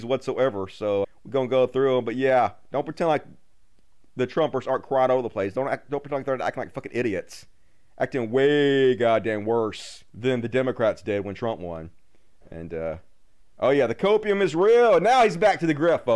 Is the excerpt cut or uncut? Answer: cut